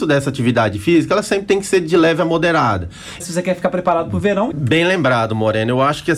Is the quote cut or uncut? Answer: cut